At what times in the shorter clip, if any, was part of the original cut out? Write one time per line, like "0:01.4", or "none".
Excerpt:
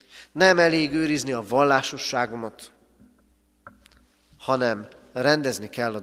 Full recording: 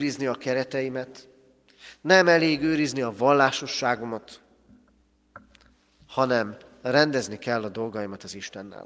none